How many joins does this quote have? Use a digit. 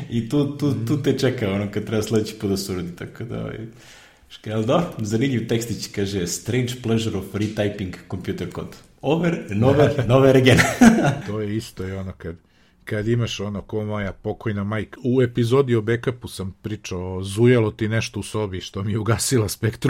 2